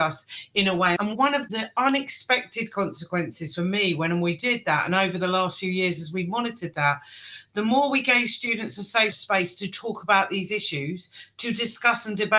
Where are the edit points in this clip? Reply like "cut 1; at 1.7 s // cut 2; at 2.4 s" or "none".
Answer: cut 1; at 1.0 s